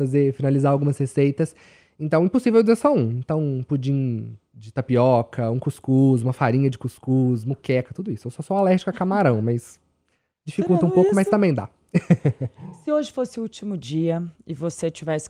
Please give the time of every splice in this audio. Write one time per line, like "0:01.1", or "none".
none

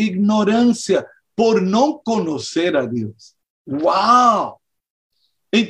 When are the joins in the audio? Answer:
none

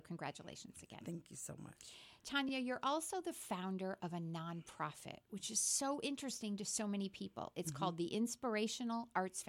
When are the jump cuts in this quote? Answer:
none

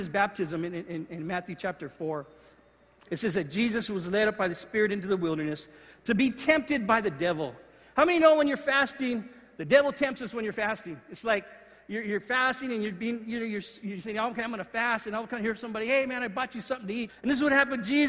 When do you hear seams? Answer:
0:03.1
0:17.1

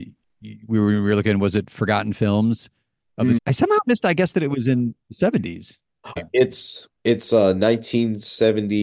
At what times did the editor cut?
0:03.4
0:06.2

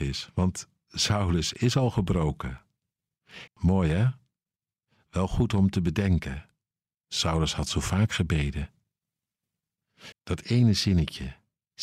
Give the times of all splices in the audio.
0:03.5
0:06.9
0:10.1

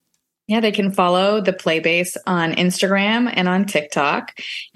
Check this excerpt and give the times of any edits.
none

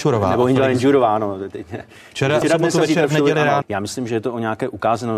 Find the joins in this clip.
0:02.4
0:03.6

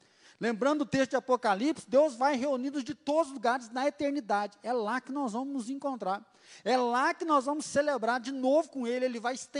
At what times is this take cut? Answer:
none

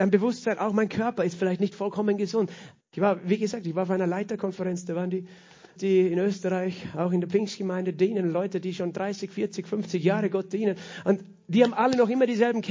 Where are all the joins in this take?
0:02.8
0:05.8

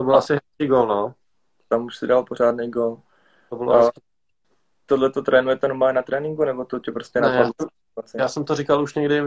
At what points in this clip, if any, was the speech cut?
none

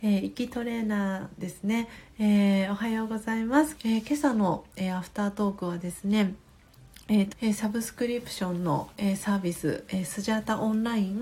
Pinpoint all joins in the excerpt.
0:03.8
0:07.3

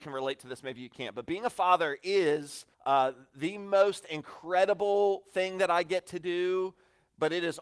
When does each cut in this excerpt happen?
0:02.7

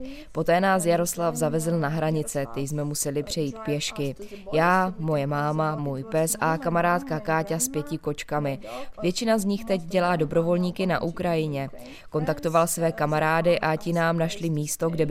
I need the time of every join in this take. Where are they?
0:05.8
0:08.9

